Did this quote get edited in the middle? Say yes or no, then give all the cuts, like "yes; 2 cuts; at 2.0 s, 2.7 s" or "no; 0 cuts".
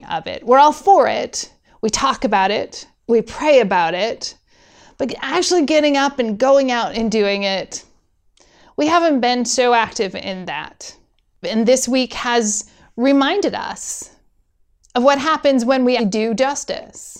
yes; 2 cuts; at 11.4 s, 16.0 s